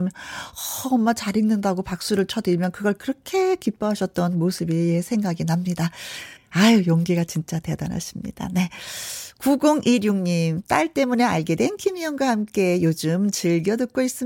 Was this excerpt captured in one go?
no; 1 cut; at 6.4 s

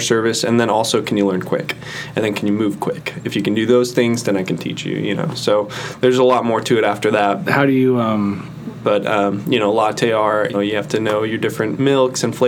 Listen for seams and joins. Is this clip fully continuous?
no; 3 cuts; at 7.4 s, 8.8 s, 10.5 s

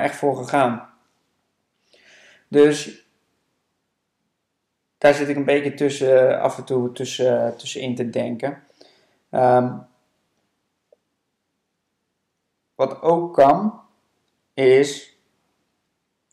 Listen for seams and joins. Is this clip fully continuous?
yes; 0 cuts

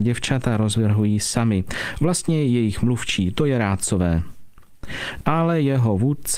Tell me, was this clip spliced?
yes; 1 cut; at 5.2 s

